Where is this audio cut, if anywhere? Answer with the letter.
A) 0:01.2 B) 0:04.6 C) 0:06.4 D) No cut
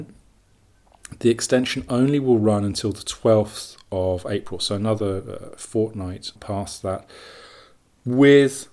C